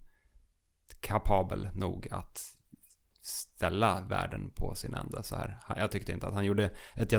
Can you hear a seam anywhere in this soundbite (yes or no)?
no